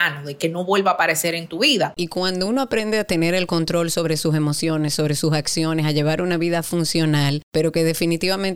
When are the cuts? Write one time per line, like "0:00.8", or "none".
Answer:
0:02.0
0:07.4